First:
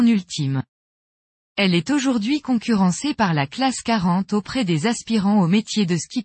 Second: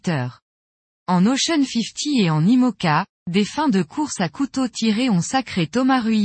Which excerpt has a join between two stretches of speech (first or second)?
first